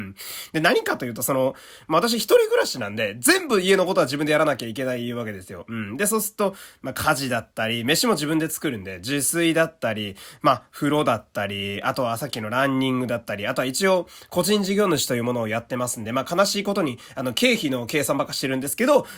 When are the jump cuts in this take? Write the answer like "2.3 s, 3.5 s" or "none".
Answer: none